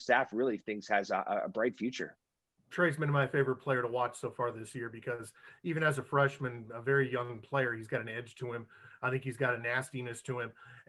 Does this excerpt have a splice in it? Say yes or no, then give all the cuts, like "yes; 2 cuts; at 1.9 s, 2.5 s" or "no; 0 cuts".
no; 0 cuts